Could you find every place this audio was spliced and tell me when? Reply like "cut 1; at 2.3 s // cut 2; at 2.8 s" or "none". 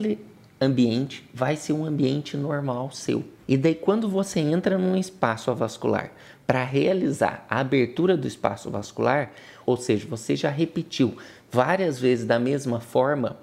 cut 1; at 3.4 s // cut 2; at 9.6 s